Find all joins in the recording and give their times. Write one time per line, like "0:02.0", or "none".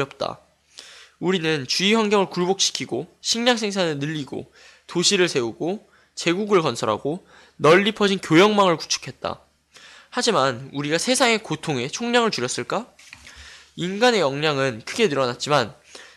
none